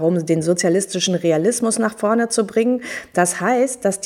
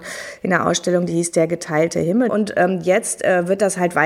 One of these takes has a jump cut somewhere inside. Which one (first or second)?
second